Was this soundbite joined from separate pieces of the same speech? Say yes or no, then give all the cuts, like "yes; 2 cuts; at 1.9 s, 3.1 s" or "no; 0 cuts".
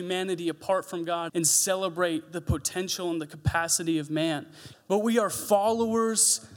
yes; 2 cuts; at 1.3 s, 4.7 s